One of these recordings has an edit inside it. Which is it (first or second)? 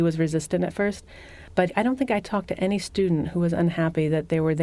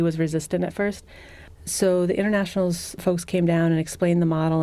second